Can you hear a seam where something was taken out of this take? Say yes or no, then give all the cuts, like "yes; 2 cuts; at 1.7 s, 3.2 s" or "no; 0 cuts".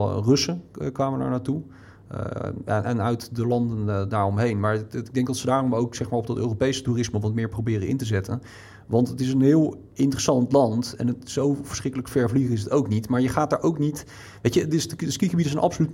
no; 0 cuts